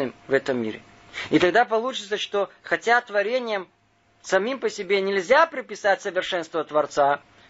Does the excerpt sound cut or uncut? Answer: uncut